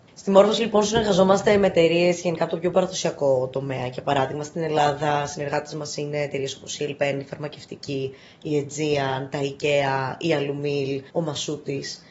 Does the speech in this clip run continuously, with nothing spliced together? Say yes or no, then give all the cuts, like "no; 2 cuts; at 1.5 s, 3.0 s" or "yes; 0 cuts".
no; 1 cut; at 11.1 s